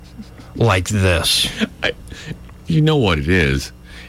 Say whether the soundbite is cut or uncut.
uncut